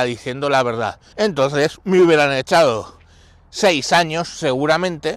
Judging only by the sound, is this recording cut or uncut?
cut